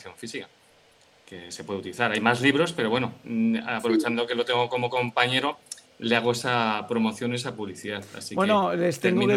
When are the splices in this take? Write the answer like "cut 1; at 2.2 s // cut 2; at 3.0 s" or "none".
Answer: none